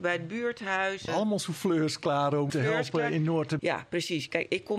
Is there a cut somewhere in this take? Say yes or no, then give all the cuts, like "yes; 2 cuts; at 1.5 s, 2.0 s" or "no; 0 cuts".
yes; 3 cuts; at 1.1 s, 2.5 s, 3.6 s